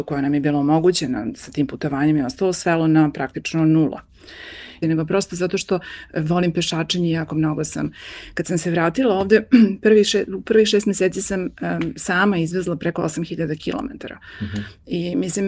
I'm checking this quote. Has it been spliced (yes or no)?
yes